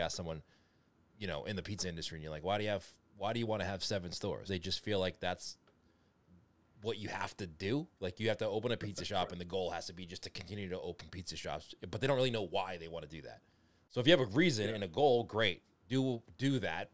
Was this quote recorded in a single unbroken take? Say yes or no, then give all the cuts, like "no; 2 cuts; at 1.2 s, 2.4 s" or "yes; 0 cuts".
no; 1 cut; at 4.5 s